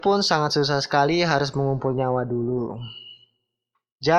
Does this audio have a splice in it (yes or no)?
no